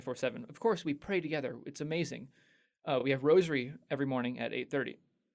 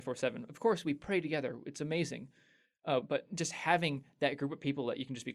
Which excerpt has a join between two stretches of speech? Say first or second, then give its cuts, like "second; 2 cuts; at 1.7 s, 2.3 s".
second; 1 cut; at 3.0 s